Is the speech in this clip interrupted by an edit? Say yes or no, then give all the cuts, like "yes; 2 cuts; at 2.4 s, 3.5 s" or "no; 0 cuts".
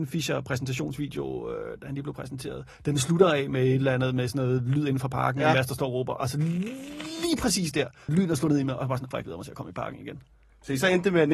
yes; 2 cuts; at 8.1 s, 9.1 s